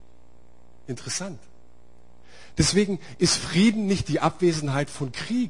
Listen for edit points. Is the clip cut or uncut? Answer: cut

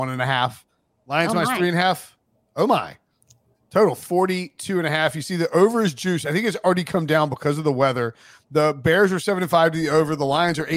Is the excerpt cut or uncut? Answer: cut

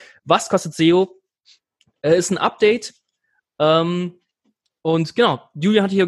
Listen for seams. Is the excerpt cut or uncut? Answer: uncut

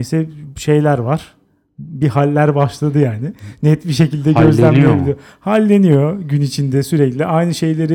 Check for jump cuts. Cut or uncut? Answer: uncut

